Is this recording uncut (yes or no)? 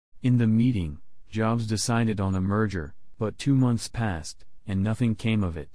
yes